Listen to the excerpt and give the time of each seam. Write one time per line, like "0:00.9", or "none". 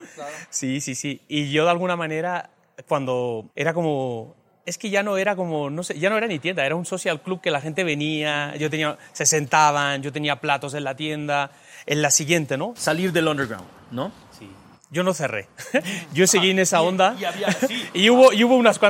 0:03.5
0:12.8